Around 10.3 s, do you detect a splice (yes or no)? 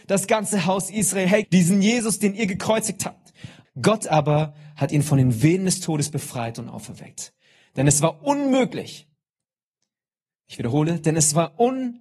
no